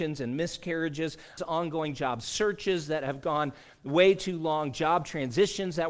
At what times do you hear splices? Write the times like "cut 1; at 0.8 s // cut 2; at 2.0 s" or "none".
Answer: cut 1; at 1.4 s